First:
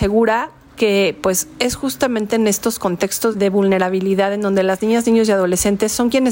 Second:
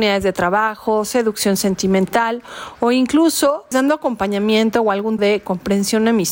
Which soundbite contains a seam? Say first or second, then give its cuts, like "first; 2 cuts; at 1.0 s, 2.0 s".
second; 2 cuts; at 3.7 s, 5.2 s